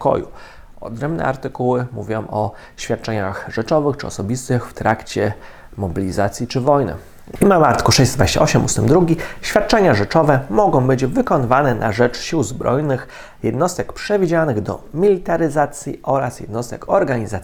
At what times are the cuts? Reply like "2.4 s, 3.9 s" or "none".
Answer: none